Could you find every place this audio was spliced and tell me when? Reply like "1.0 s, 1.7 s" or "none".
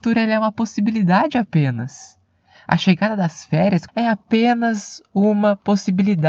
3.9 s